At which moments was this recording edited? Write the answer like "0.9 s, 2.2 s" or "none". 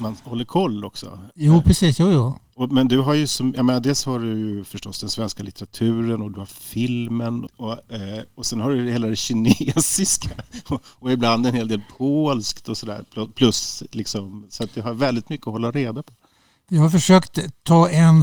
7.5 s